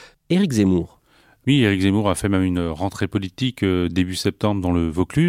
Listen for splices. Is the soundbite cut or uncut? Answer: uncut